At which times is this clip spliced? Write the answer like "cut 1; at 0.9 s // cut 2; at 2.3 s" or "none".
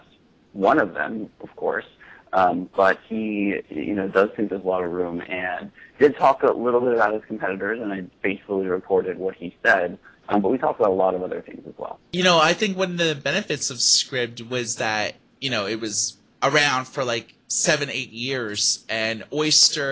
none